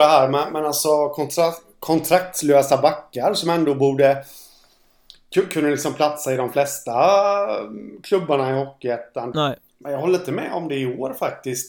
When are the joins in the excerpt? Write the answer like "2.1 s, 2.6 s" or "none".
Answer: 9.3 s